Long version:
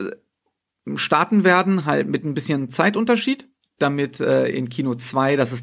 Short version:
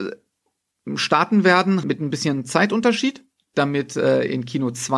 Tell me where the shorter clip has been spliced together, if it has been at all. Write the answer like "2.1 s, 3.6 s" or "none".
1.8 s